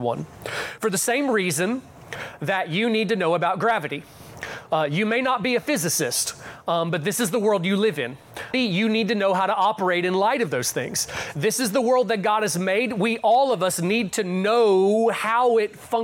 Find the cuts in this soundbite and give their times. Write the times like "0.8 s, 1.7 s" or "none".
8.5 s